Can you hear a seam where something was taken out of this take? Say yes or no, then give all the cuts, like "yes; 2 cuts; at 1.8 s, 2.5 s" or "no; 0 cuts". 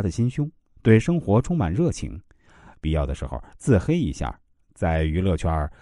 yes; 1 cut; at 4.6 s